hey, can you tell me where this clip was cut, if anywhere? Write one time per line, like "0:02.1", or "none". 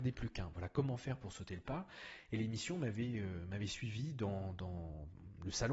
none